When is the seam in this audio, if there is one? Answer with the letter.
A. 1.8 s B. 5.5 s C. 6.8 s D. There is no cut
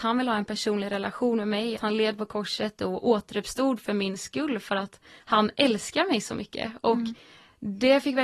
A